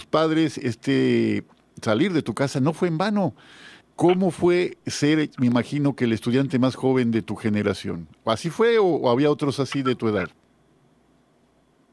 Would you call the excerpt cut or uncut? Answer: cut